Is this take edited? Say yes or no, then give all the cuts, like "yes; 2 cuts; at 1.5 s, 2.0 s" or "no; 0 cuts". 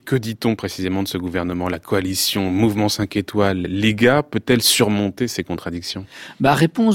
no; 0 cuts